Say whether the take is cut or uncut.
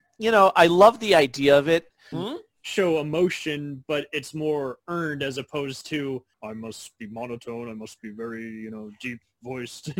cut